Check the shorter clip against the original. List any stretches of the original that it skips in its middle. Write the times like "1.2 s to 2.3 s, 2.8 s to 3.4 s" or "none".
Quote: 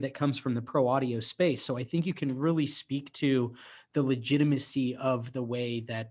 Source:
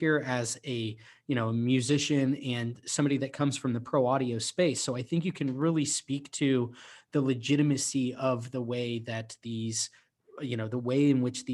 none

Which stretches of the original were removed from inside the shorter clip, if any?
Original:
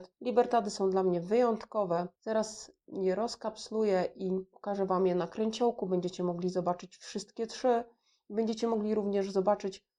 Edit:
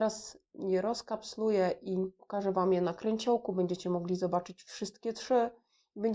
none

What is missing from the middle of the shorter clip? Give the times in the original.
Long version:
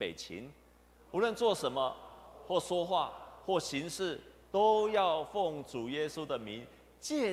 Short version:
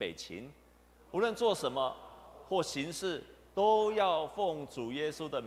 2.4 s to 3.4 s

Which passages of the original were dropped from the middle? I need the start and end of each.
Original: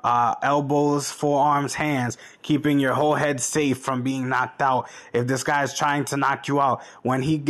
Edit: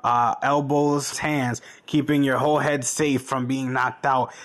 1.1 s to 1.7 s

